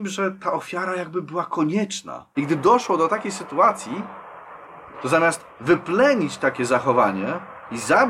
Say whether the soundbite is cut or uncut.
cut